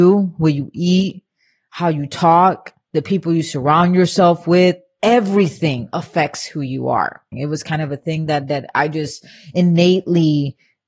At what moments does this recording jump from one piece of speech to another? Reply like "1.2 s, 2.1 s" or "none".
7.3 s